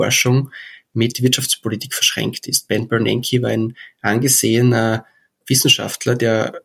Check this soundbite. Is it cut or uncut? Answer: uncut